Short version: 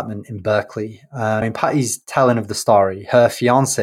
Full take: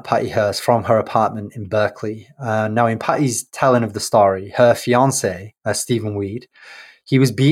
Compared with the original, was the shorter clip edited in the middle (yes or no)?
yes